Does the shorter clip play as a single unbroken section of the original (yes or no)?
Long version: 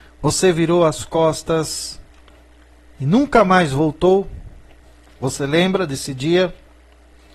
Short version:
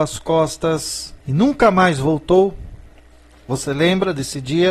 no